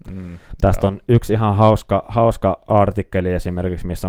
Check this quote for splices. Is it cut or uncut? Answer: uncut